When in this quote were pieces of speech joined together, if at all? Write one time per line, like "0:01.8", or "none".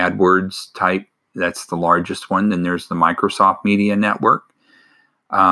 none